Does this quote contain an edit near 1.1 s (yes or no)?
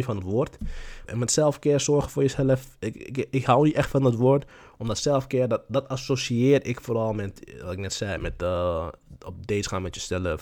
yes